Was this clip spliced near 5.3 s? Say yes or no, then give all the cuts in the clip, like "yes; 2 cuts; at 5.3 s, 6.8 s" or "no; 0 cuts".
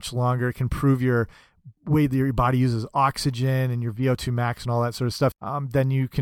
yes; 1 cut; at 5.3 s